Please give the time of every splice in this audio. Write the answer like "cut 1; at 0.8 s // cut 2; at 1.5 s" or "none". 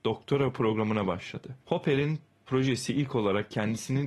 cut 1; at 1.6 s